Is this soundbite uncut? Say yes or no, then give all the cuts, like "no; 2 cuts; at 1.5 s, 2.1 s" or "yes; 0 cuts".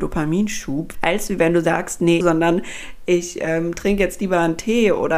no; 2 cuts; at 0.9 s, 2.2 s